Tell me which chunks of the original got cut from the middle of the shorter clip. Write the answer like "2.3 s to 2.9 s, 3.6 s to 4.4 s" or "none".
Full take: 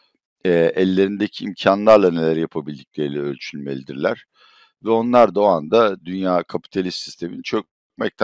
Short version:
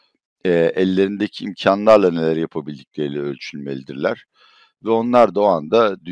none

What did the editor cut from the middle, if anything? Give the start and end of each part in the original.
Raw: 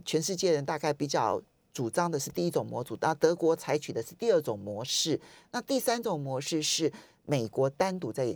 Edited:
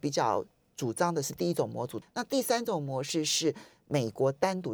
3.0 s to 5.4 s

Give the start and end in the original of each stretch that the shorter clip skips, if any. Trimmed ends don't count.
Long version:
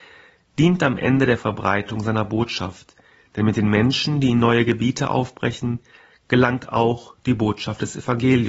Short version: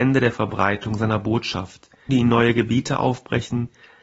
3.1 s to 4.2 s

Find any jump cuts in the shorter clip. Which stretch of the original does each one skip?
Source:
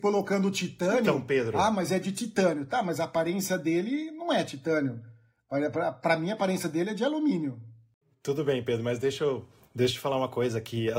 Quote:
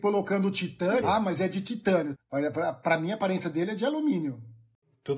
1.0 s to 1.5 s, 2.7 s to 5.3 s

